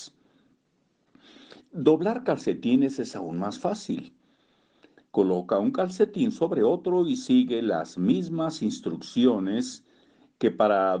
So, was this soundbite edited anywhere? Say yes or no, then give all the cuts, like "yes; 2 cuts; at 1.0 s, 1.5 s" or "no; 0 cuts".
yes; 1 cut; at 5.0 s